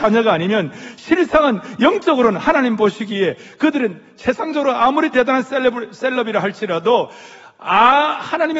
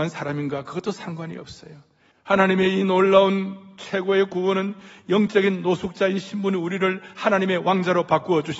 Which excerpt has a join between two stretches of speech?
second; 1 cut; at 2.1 s

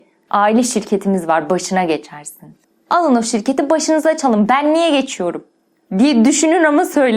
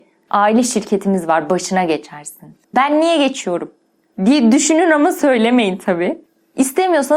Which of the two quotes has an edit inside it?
second; 1 cut; at 2.7 s

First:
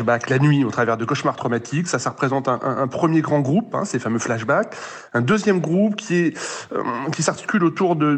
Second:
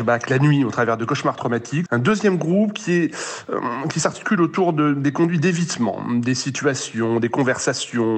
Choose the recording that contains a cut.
second; 1 cut; at 1.9 s

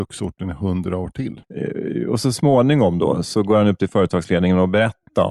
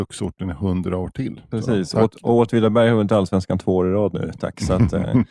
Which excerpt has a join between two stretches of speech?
first; 2 cuts; at 1.4 s, 3.2 s

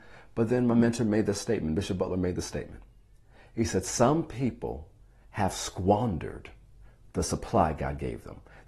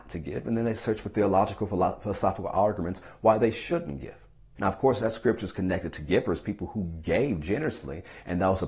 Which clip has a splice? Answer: second; 1 cut; at 4.6 s

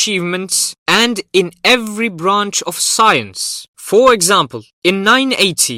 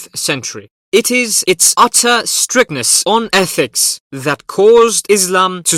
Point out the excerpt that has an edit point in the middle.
first; 1 cut; at 3.7 s

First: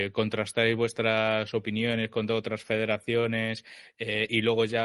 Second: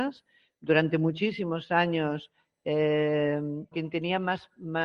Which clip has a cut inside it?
second; 1 cut; at 3.7 s

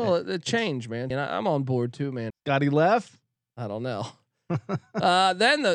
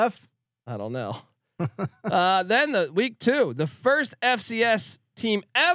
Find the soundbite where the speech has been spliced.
first; 2 cuts; at 1.1 s, 2.3 s

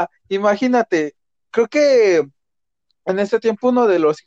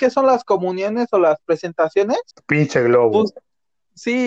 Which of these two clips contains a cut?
second; 1 cut; at 2.3 s

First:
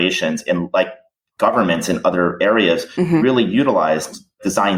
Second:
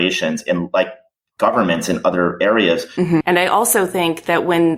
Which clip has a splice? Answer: second; 1 cut; at 3.2 s

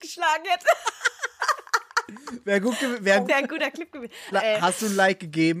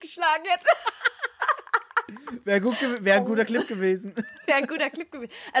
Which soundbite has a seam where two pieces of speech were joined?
first; 2 cuts; at 3.2 s, 4.3 s

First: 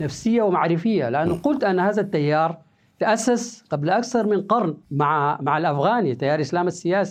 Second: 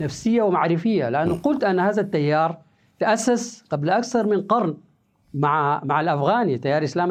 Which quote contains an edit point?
first; 1 cut; at 4.8 s

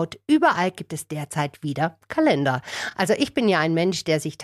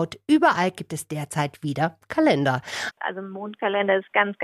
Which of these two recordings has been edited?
second; 1 cut; at 2.9 s

